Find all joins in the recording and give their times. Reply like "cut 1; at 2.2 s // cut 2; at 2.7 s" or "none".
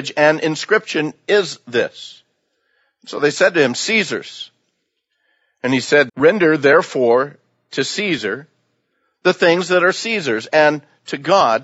cut 1; at 6.1 s